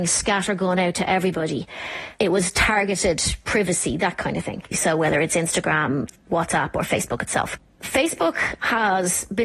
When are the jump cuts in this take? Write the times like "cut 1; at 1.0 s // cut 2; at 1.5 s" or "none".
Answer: cut 1; at 4.7 s